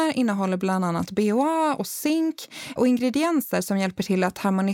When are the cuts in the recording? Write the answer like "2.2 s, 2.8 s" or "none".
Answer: 2.8 s